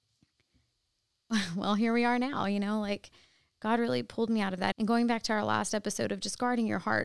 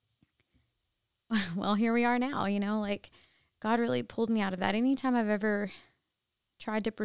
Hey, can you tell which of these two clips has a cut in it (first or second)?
first